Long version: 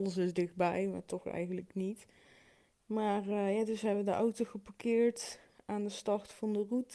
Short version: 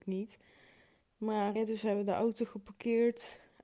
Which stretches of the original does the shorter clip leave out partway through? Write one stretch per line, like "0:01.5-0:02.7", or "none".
0:03.2-0:03.5